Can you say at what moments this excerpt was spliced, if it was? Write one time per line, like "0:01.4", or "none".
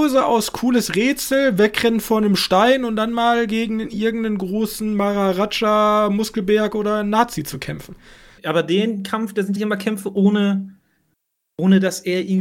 0:08.4
0:09.6